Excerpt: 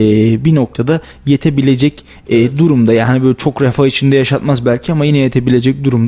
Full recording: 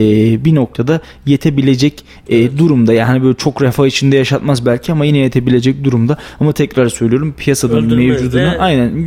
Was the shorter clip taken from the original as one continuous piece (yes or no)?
yes